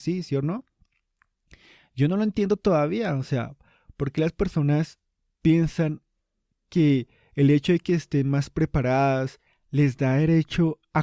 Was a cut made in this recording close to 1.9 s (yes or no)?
no